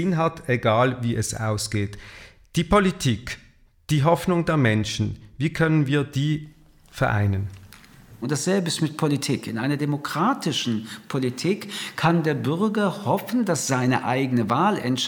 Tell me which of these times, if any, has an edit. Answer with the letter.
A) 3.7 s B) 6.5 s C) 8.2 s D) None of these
C